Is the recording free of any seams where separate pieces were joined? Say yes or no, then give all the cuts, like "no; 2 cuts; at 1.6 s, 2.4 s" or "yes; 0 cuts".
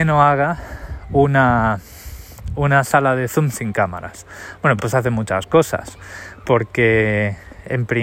yes; 0 cuts